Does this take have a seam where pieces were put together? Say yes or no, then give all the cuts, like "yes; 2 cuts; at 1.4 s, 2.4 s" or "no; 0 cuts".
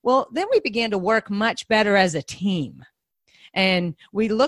no; 0 cuts